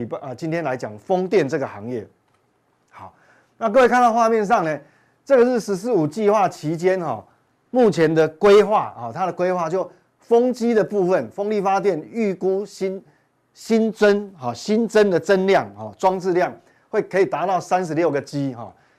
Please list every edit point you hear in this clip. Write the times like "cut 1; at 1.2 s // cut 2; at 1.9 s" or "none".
none

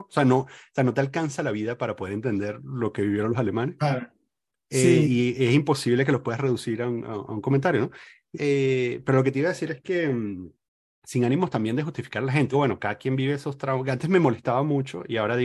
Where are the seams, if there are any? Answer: cut 1; at 8.3 s // cut 2; at 12.5 s

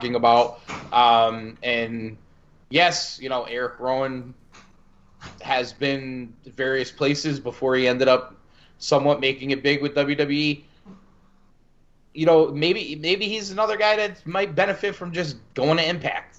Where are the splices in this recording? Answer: none

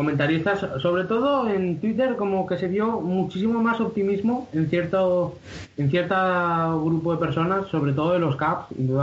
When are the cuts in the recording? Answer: none

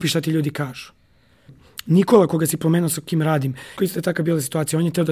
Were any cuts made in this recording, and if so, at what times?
cut 1; at 1.5 s // cut 2; at 3.8 s

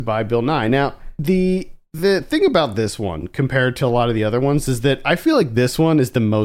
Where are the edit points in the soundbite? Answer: none

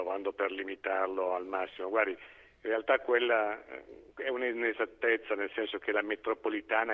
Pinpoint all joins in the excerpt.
none

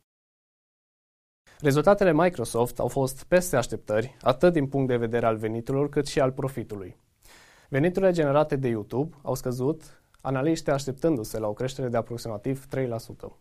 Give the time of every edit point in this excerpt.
cut 1; at 1.6 s // cut 2; at 7.6 s

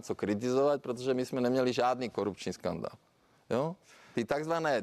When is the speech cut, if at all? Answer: none

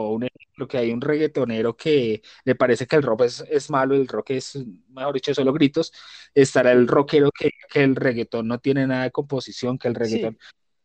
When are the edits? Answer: none

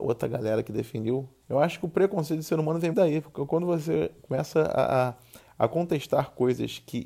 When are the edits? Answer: cut 1; at 1.4 s // cut 2; at 2.9 s

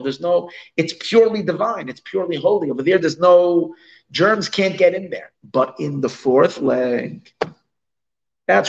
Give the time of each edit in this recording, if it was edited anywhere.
cut 1; at 5.4 s

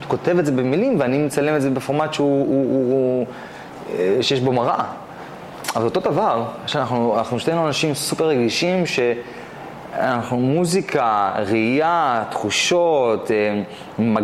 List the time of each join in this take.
none

